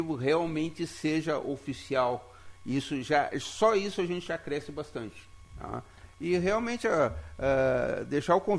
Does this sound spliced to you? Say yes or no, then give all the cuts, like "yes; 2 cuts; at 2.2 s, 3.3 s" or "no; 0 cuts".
no; 0 cuts